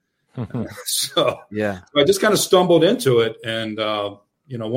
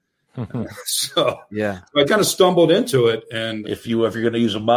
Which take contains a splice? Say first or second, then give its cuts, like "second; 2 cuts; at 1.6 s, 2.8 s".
second; 2 cuts; at 2.1 s, 3.6 s